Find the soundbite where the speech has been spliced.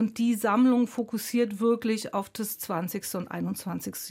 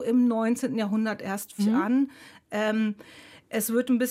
second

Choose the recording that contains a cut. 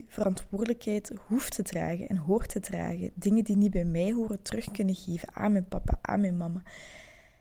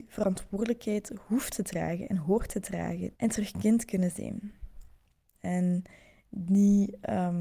second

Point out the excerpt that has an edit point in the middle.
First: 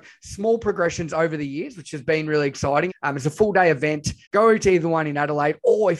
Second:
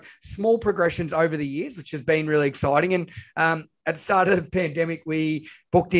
first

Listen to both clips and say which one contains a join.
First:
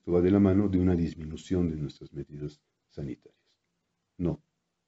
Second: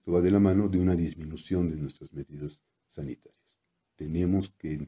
second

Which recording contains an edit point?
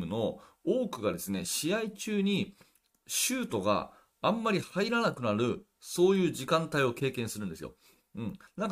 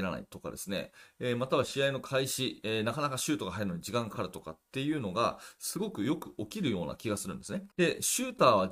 second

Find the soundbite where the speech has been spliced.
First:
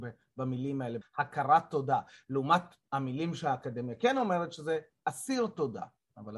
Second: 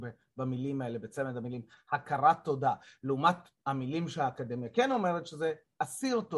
first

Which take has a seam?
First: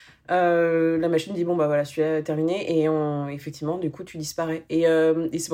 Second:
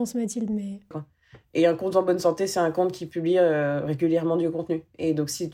second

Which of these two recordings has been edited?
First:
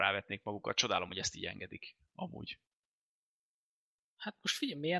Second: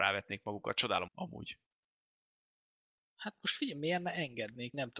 second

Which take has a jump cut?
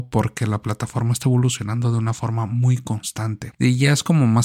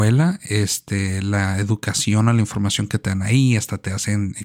first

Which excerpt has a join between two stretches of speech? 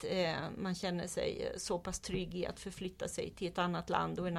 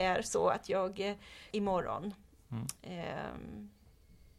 second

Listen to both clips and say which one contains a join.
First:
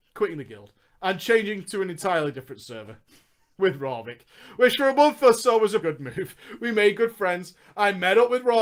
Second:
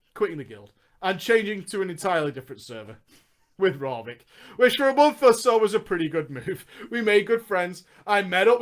first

